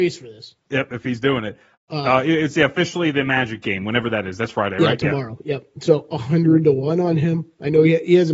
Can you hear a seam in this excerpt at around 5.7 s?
no; 1 cut; at 1.8 s

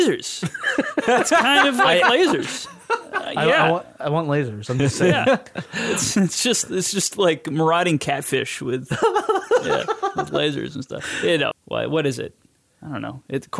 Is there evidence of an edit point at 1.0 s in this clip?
no; 1 cut; at 11.5 s

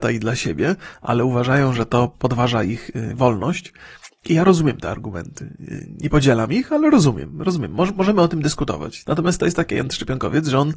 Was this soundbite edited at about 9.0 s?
yes; 1 cut; at 9.0 s

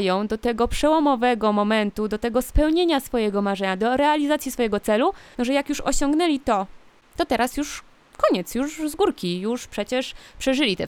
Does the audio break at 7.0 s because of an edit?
yes; 2 cuts; at 5.3 s, 7.0 s

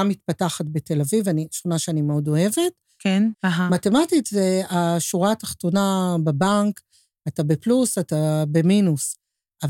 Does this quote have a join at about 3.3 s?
yes; 1 cut; at 3.3 s

